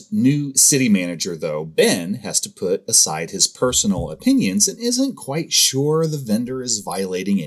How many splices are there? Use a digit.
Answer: 0